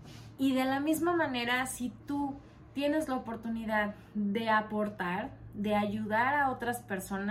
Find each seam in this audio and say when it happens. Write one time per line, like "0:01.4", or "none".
none